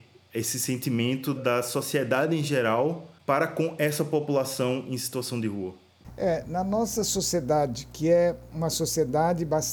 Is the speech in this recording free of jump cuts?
no; 1 cut; at 1.4 s

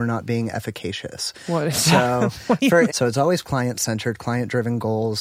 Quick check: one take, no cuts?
no; 1 cut; at 2.9 s

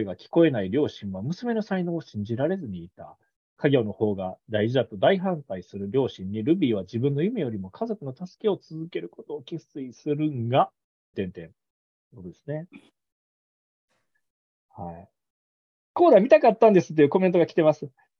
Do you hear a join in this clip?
yes; 1 cut; at 11.1 s

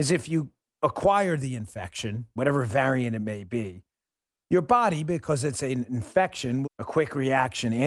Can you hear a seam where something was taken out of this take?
yes; 2 cuts; at 2.4 s, 6.6 s

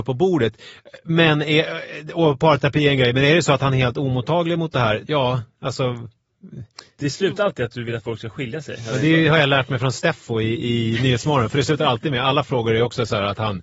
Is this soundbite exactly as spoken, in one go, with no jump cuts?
no; 1 cut; at 5.0 s

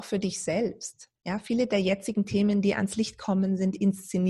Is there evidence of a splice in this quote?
no; 0 cuts

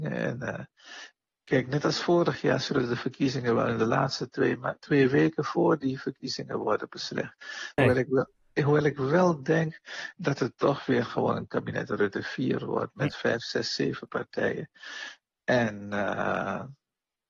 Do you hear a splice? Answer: yes; 1 cut; at 7.8 s

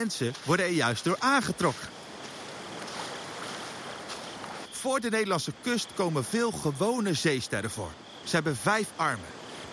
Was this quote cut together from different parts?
yes; 2 cuts; at 4.7 s, 8.2 s

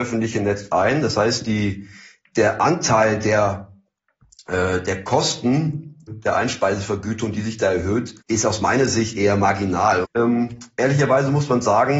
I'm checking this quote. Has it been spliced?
yes; 3 cuts; at 6.1 s, 8.2 s, 10.0 s

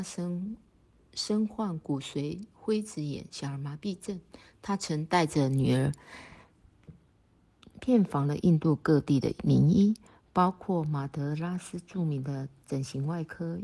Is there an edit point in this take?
yes; 1 cut; at 7.7 s

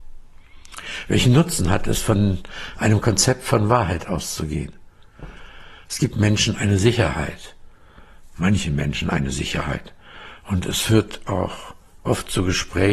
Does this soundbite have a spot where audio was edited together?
no; 0 cuts

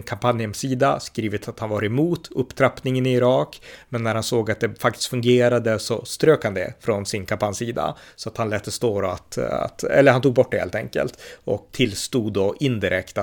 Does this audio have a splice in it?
yes; 1 cut; at 11.7 s

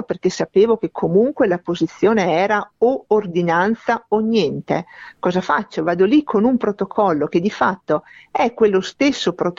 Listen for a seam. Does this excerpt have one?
no; 0 cuts

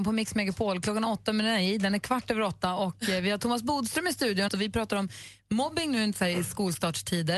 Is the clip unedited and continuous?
no; 1 cut; at 4.5 s

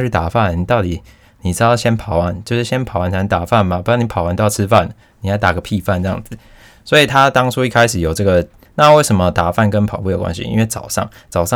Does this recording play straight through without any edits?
no; 1 cut; at 8.7 s

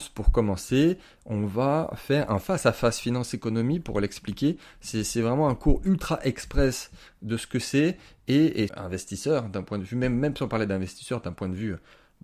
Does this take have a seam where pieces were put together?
yes; 1 cut; at 8.7 s

